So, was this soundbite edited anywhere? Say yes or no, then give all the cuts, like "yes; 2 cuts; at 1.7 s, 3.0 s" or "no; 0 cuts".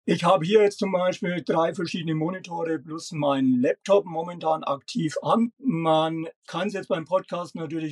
no; 0 cuts